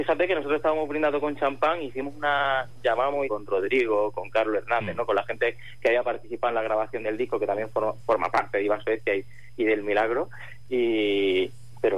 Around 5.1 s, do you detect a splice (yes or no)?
no